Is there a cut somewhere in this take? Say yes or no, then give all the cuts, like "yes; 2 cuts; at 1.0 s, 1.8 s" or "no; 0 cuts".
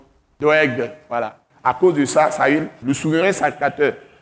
yes; 2 cuts; at 1.5 s, 2.8 s